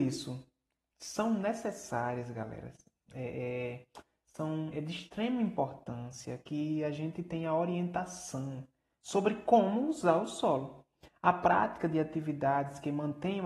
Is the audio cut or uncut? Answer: cut